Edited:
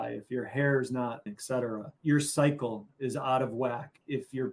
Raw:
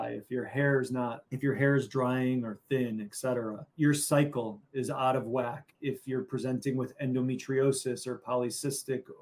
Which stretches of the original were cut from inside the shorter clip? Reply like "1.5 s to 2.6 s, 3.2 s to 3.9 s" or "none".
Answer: 1.3 s to 3.0 s